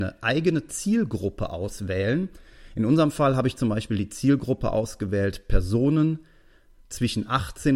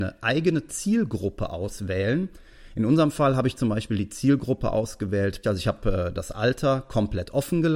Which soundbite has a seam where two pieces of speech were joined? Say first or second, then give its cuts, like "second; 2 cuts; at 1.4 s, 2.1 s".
second; 1 cut; at 5.4 s